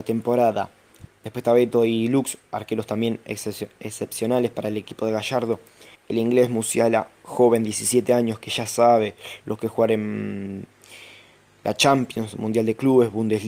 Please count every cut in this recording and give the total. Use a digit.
3